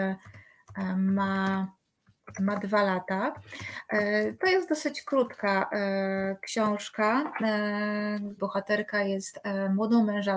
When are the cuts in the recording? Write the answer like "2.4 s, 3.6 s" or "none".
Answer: 8.4 s